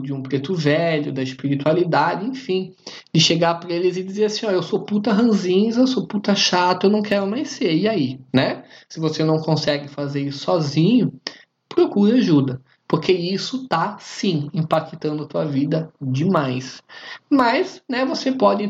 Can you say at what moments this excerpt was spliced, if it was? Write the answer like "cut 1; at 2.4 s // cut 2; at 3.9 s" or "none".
cut 1; at 8.3 s

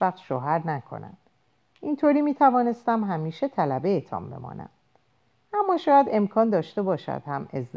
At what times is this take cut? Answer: none

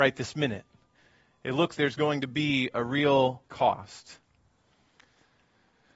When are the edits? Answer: cut 1; at 1.8 s // cut 2; at 3.4 s

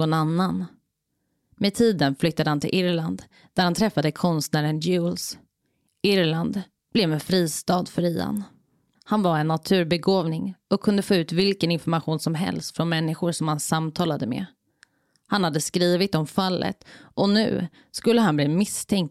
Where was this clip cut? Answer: cut 1; at 8.9 s

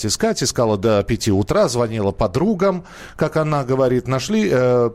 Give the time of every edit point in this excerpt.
none

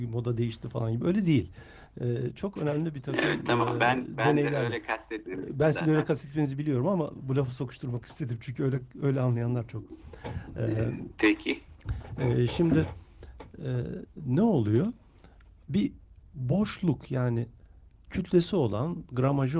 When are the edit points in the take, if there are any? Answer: none

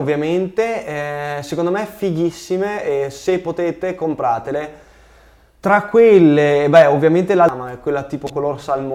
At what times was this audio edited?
none

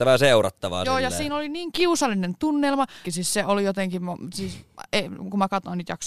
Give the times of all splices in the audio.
cut 1; at 3.0 s

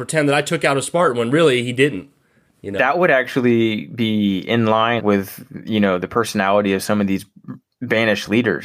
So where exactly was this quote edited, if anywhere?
cut 1; at 5.0 s

